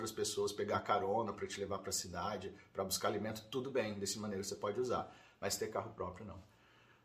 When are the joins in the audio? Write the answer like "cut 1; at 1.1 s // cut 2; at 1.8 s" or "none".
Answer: none